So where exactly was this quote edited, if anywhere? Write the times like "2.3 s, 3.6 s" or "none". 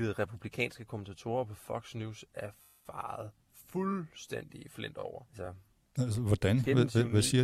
5.3 s